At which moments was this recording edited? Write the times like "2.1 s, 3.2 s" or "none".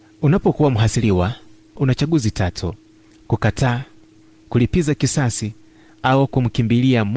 none